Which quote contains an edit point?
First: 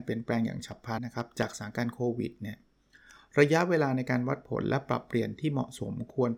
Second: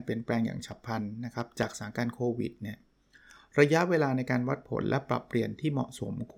first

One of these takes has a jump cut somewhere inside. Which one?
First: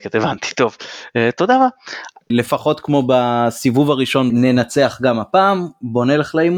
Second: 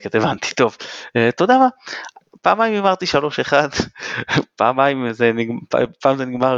first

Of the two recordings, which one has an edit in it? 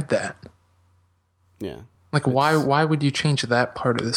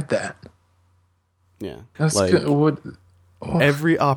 second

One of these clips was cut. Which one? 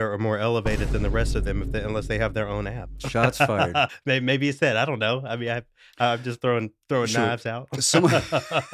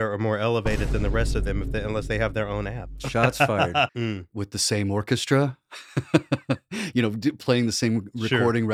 second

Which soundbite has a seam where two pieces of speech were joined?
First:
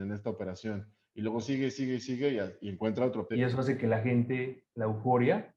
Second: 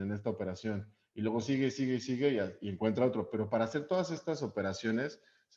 first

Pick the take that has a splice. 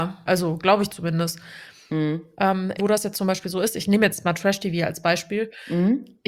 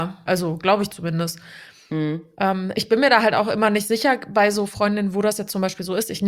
first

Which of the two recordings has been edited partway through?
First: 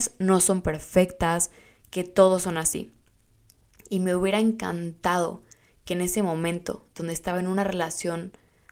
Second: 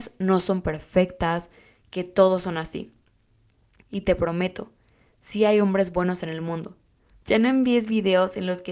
second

